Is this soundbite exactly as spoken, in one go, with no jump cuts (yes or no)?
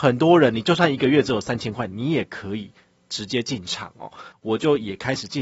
no